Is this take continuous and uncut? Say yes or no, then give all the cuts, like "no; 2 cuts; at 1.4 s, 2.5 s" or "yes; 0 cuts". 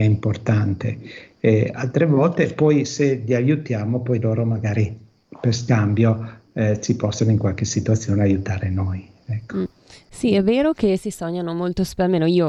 yes; 0 cuts